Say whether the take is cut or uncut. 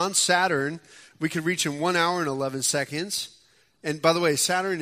uncut